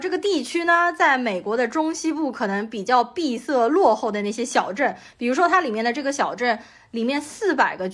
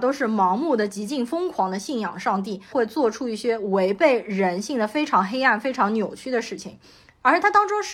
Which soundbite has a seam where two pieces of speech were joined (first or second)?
second